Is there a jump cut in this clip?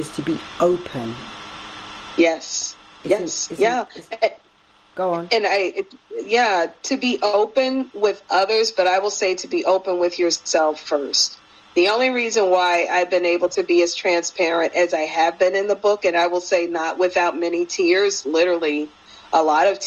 no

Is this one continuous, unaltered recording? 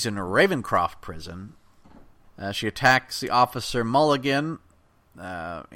no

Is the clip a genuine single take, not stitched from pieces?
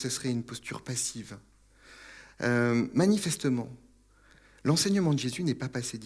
yes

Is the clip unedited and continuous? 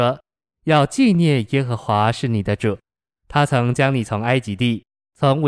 yes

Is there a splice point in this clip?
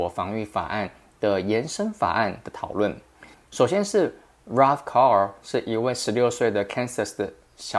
yes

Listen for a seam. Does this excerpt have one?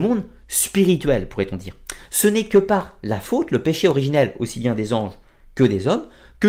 no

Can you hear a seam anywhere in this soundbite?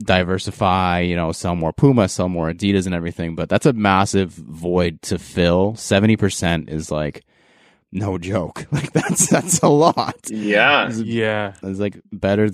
no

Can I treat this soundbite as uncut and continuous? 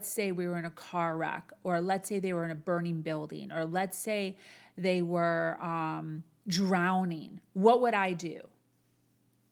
yes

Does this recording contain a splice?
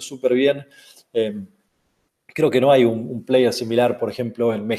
no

